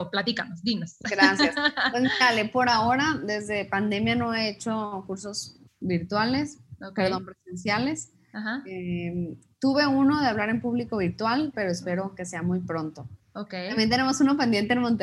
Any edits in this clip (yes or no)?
yes